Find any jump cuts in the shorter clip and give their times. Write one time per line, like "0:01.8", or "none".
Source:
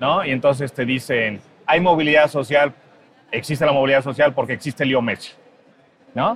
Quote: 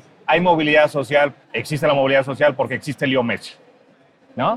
0:01.4